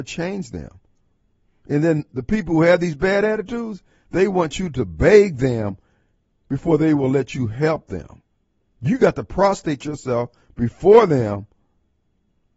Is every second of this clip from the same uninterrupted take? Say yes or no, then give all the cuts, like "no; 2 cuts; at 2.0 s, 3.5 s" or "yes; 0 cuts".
yes; 0 cuts